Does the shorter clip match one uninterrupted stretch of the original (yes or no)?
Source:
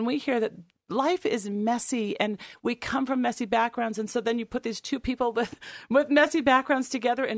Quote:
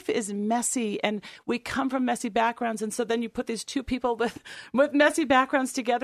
yes